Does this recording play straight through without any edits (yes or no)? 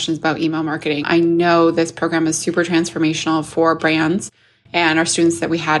no